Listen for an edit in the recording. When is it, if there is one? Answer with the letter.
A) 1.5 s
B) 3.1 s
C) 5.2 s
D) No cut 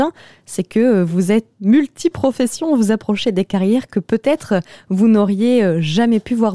A